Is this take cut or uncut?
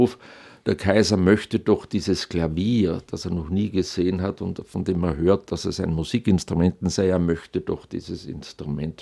uncut